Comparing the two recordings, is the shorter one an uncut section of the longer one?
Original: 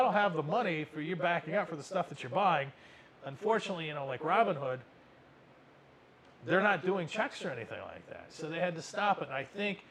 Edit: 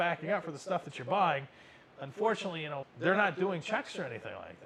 no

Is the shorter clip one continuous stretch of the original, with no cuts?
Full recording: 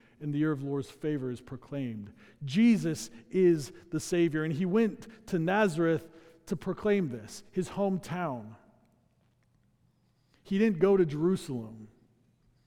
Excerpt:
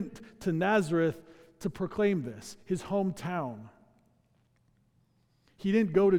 yes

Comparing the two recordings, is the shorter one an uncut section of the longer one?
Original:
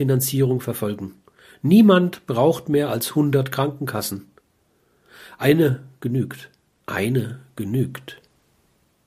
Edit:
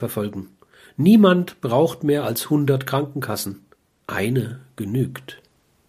no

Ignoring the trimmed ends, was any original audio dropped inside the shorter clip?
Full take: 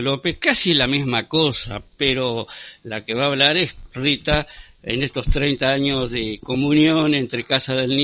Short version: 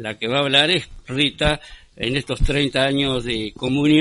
no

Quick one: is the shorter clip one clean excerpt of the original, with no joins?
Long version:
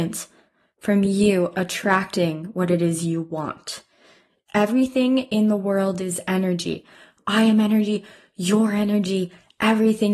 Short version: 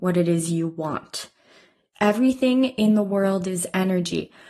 yes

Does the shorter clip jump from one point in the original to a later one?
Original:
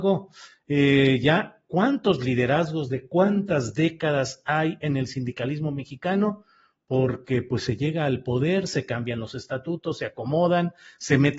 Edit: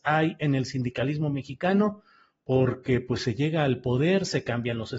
no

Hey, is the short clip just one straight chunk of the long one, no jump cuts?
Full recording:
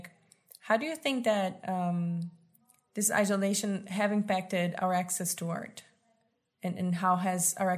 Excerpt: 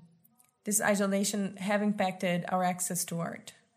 yes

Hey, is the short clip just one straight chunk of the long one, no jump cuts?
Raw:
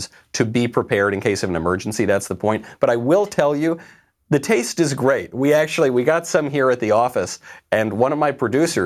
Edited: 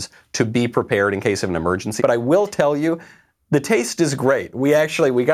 no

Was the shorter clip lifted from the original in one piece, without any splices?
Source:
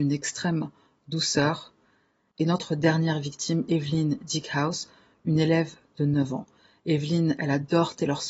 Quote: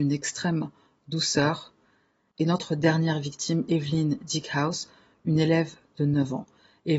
yes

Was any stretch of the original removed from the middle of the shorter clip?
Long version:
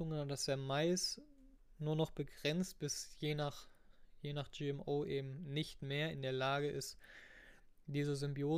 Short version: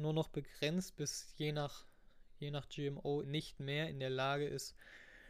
yes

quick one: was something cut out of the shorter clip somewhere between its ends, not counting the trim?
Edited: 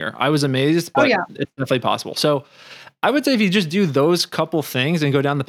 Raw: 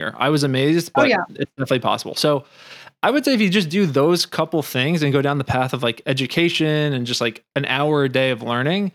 no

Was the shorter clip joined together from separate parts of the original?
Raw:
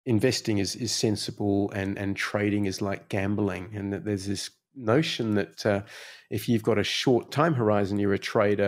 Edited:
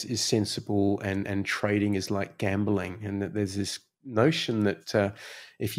no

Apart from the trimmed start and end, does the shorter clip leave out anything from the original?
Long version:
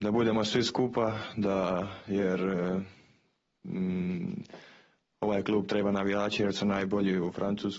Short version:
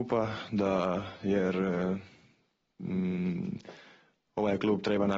no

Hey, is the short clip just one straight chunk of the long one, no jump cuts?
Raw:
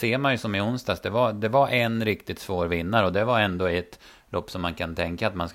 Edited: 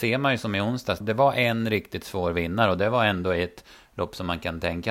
no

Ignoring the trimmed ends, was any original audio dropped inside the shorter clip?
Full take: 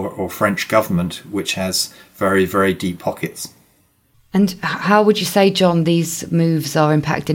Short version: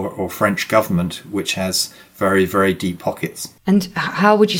yes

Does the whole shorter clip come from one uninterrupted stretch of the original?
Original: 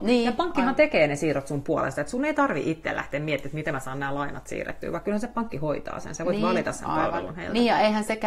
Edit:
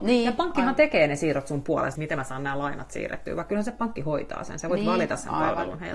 no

